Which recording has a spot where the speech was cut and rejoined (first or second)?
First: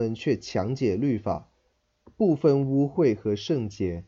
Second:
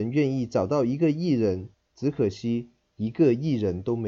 second